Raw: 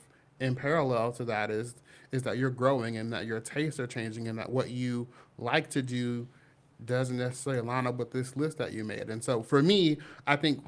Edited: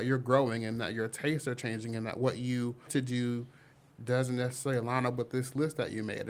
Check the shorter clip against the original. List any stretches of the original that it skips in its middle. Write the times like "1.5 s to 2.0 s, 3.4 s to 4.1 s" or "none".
5.2 s to 5.7 s